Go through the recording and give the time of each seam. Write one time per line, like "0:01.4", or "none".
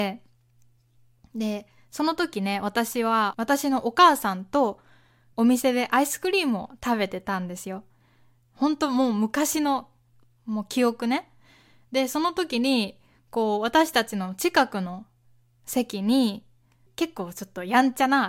none